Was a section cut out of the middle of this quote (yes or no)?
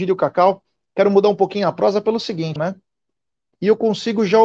yes